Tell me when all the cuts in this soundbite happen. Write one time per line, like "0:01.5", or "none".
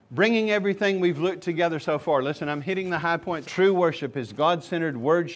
0:03.4